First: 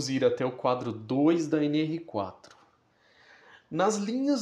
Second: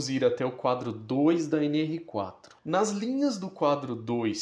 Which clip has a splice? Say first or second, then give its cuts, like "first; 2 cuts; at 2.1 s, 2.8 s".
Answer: second; 1 cut; at 2.6 s